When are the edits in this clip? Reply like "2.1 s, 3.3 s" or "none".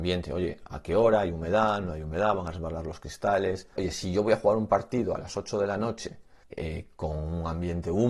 3.8 s, 6.4 s